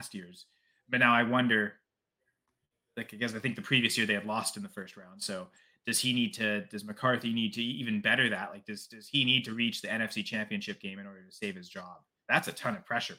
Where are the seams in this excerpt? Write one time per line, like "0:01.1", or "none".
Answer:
none